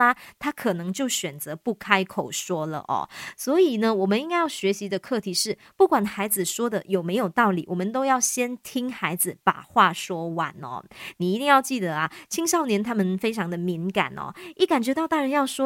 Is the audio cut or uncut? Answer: uncut